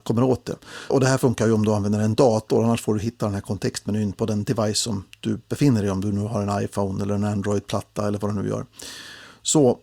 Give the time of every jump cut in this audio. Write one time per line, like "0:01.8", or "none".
0:00.9